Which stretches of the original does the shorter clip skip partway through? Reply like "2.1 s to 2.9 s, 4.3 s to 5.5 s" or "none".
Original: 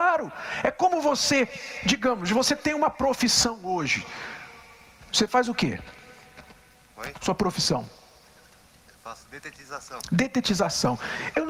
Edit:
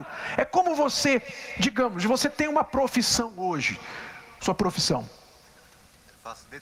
4.6 s to 7.2 s